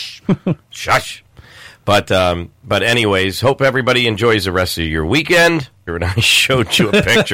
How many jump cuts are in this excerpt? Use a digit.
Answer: 1